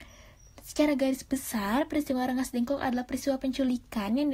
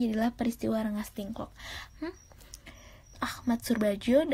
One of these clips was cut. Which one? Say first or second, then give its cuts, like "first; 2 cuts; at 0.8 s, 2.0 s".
second; 2 cuts; at 1.9 s, 3.1 s